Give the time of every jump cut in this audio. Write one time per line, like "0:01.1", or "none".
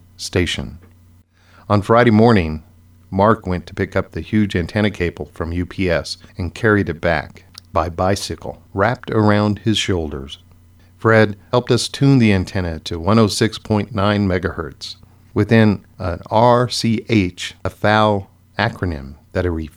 0:11.5
0:17.6